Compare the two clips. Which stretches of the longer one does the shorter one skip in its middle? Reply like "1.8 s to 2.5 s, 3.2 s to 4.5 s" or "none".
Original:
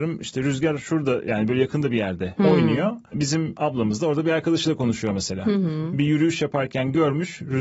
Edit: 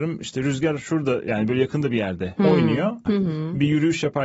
3.1 s to 5.4 s